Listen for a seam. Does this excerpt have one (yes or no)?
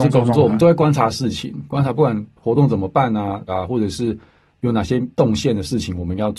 yes